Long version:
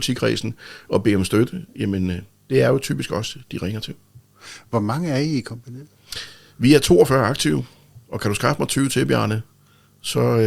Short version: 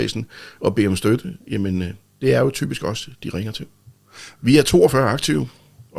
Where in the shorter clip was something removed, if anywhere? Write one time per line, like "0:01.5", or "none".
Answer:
0:04.4